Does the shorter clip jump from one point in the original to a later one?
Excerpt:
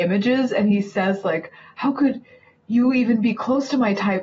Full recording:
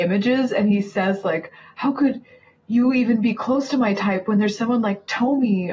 no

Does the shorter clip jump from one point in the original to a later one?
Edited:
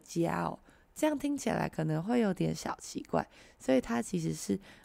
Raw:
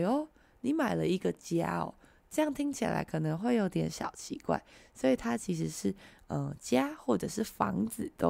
no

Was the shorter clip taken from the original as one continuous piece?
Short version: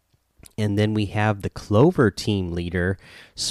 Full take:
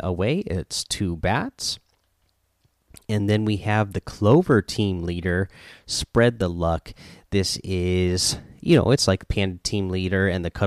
yes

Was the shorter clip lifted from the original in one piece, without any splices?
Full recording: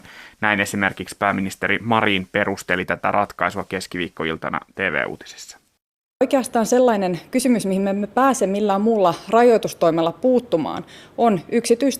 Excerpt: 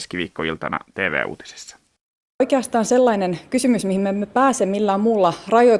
yes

